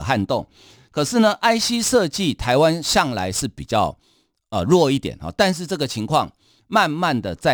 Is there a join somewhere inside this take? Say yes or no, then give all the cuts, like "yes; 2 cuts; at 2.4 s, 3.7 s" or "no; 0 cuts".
no; 0 cuts